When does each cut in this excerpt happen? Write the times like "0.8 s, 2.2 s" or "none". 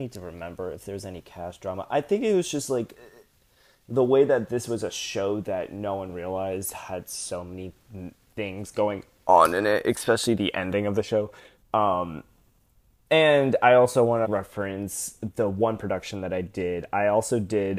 11.6 s, 14.2 s